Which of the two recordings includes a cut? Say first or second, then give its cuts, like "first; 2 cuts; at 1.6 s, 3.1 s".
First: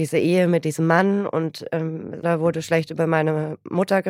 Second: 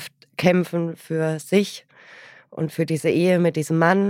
first; 1 cut; at 2.2 s